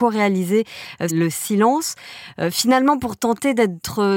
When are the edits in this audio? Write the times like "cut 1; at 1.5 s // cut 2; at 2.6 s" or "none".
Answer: cut 1; at 1.1 s